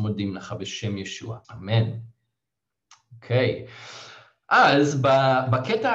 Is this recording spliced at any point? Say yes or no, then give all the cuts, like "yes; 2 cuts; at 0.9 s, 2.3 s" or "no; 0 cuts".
yes; 1 cut; at 1.4 s